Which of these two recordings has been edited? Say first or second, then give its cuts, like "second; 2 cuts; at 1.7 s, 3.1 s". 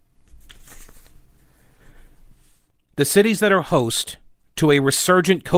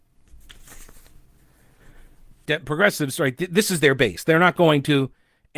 second; 1 cut; at 2.5 s